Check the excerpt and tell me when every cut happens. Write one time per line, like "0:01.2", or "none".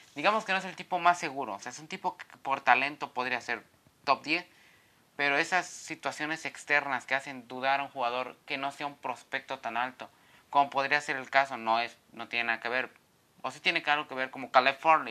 none